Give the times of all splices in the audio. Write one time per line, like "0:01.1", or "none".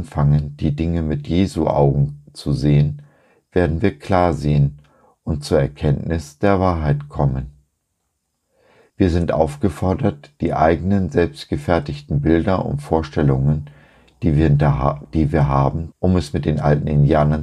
0:08.9
0:15.9